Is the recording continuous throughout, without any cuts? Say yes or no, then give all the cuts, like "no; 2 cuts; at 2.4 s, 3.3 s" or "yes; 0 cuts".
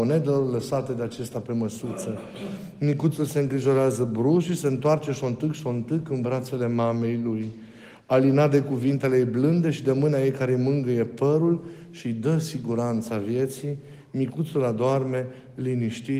yes; 0 cuts